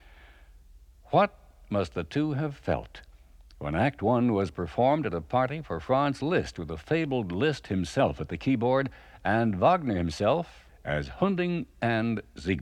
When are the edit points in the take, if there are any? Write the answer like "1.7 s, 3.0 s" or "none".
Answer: 10.7 s